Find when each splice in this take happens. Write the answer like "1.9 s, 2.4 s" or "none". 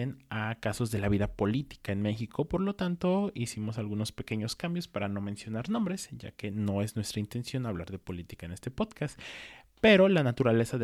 none